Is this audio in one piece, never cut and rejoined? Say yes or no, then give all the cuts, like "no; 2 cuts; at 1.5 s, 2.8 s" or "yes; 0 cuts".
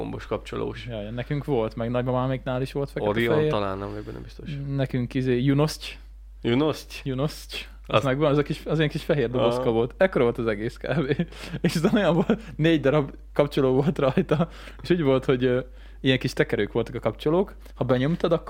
yes; 0 cuts